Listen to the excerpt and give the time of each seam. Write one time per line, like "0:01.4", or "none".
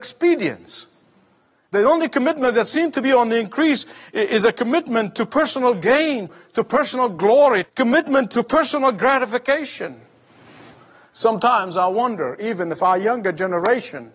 0:07.6